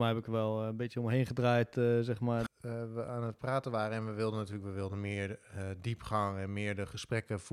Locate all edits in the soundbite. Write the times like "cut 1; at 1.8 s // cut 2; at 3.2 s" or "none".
cut 1; at 2.5 s